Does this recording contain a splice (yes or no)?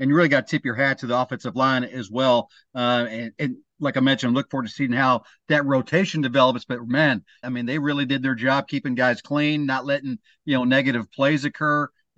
yes